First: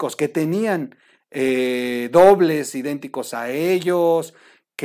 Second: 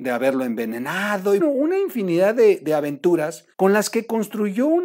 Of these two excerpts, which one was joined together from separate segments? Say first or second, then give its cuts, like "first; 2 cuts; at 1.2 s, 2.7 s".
second; 2 cuts; at 1.4 s, 3.5 s